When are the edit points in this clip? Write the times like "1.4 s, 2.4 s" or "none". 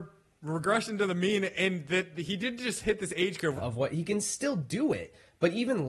3.6 s

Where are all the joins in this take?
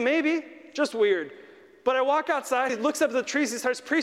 2.7 s

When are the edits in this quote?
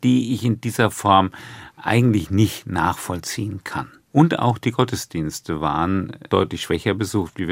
4.1 s, 6.3 s

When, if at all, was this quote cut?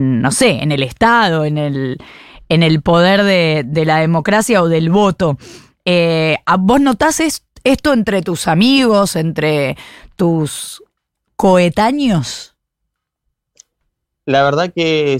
none

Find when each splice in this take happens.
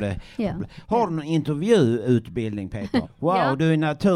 3.0 s

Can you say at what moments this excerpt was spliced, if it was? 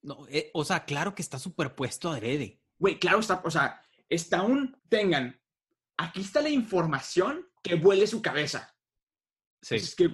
4.8 s, 7.6 s

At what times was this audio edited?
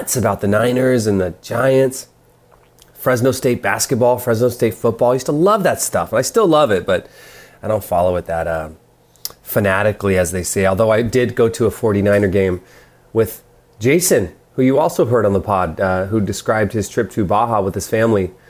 none

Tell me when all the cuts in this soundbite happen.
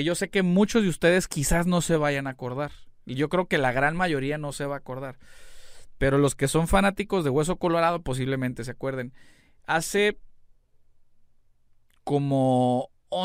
none

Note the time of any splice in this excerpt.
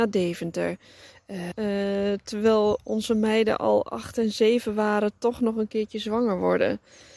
1.5 s

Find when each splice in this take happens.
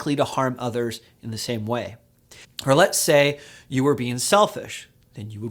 2.4 s

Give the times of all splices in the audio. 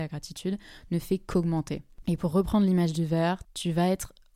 3.4 s

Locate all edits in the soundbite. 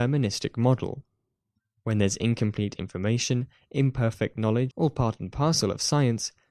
4.7 s

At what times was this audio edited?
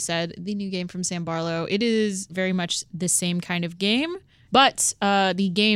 2.3 s, 4.5 s

